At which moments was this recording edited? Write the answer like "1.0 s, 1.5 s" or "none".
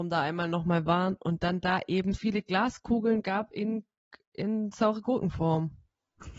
2.1 s